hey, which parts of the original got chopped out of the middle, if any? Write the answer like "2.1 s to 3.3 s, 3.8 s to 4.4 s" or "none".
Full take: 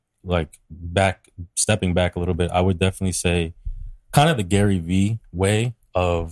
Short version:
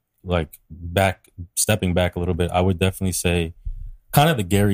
none